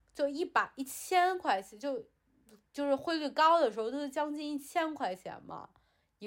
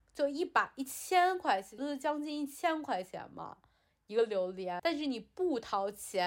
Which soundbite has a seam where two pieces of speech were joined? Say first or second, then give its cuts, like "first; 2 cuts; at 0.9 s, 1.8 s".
second; 2 cuts; at 1.8 s, 4.8 s